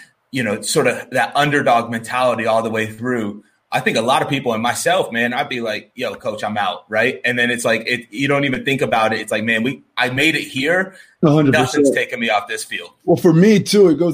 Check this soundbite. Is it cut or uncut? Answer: uncut